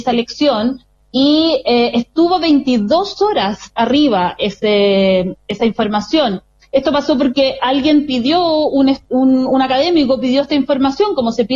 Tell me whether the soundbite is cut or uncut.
uncut